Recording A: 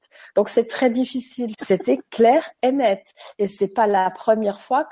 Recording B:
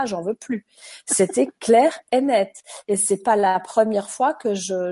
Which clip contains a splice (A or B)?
A